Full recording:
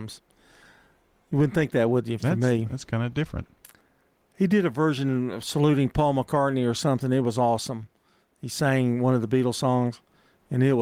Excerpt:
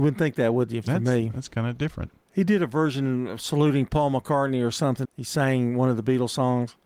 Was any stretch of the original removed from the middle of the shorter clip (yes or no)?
yes